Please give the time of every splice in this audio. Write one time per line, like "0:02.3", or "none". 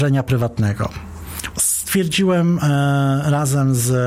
0:01.5